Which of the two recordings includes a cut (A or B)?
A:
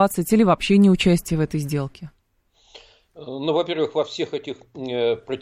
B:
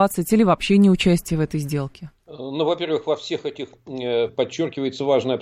B